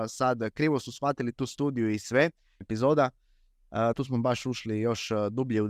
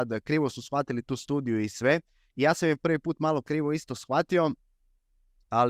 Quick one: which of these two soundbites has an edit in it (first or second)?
first